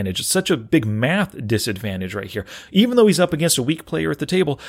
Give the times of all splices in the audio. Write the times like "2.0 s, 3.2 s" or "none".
none